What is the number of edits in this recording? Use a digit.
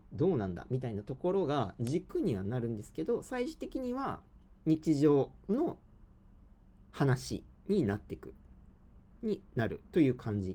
1